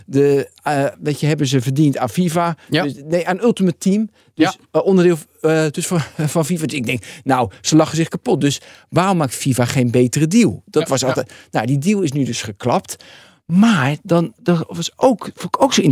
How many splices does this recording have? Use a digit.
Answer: 1